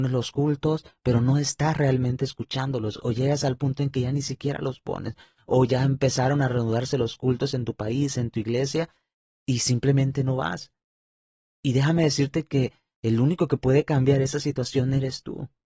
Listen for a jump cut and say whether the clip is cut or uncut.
uncut